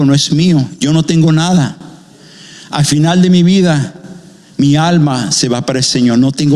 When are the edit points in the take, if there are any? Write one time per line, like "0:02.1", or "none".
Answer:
none